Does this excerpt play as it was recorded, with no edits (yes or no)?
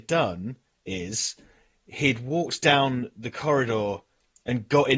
yes